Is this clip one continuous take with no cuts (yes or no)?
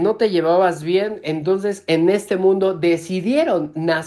yes